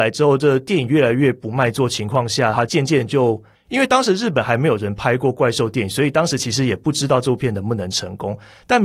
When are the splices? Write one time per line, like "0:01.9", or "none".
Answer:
0:03.6